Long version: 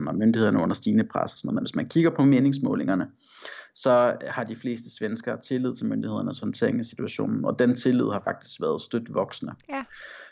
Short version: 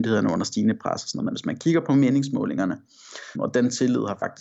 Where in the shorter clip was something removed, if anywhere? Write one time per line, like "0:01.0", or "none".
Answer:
0:03.3